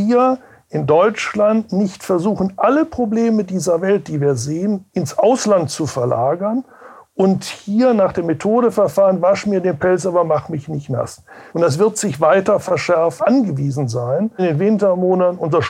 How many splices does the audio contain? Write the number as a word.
three